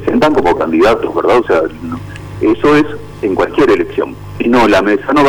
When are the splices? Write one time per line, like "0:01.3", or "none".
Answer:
0:04.4